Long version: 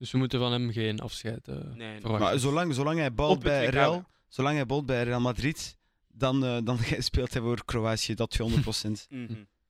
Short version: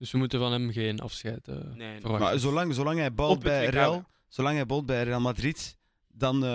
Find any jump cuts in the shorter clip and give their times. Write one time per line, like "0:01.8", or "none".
none